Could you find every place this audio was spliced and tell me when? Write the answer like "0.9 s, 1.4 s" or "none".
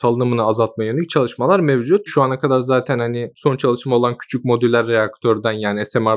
2.1 s